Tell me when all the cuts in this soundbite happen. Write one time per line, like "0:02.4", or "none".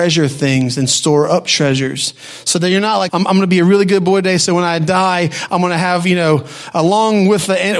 0:03.1